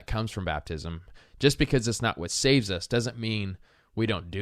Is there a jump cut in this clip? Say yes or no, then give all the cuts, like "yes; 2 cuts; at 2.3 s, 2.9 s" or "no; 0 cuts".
no; 0 cuts